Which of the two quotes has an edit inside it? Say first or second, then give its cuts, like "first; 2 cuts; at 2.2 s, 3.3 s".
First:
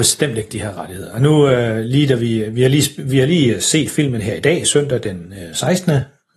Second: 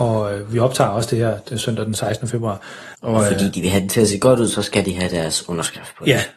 second; 1 cut; at 2.9 s